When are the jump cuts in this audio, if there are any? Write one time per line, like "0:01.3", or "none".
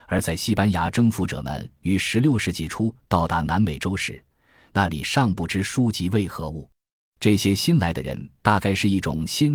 0:07.0